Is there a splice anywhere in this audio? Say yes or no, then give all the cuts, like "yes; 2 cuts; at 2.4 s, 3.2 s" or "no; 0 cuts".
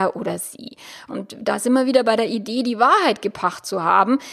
yes; 1 cut; at 1.1 s